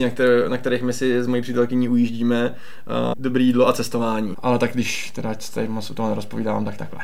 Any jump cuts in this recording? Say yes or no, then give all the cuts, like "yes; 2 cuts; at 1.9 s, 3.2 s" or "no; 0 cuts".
yes; 2 cuts; at 3.1 s, 4.3 s